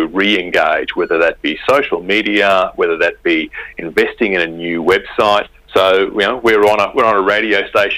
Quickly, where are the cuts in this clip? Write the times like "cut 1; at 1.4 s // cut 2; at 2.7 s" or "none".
cut 1; at 5.6 s